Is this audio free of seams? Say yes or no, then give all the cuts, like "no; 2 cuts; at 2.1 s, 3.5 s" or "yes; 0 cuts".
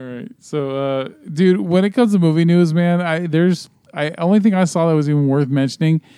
yes; 0 cuts